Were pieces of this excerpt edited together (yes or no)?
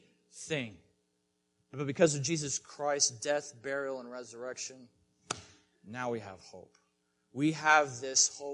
no